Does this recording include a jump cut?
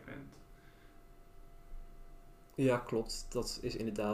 no; 0 cuts

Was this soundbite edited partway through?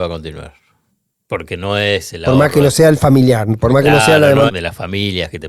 yes; 1 cut; at 4.5 s

